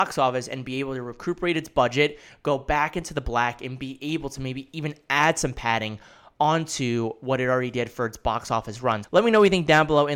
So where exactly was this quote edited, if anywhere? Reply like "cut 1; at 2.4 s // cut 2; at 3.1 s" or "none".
cut 1; at 9.0 s